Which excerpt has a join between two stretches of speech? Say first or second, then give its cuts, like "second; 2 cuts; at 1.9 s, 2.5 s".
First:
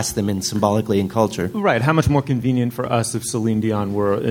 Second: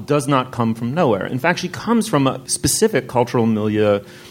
second; 1 cut; at 2.4 s